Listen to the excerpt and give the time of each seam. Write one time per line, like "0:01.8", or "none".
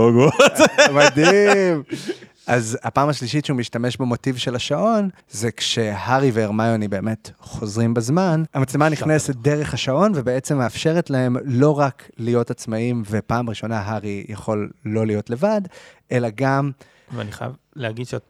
0:05.2
0:08.5
0:17.1